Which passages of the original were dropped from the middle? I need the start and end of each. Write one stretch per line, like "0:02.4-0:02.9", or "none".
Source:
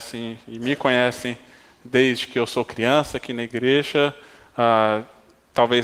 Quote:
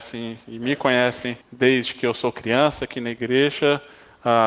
0:01.4-0:01.7